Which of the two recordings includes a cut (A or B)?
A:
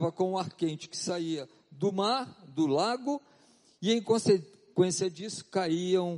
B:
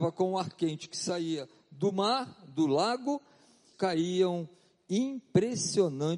B